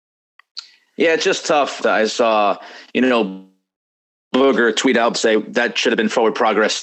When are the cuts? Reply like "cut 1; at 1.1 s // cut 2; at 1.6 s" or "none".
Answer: cut 1; at 1.8 s // cut 2; at 5.1 s